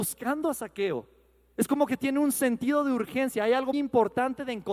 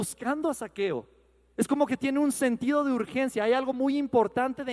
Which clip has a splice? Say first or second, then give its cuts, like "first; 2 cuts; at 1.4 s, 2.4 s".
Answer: first; 1 cut; at 3.7 s